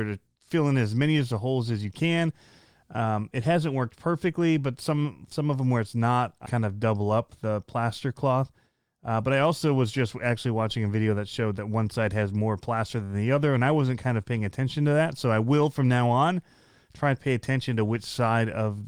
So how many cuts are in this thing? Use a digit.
1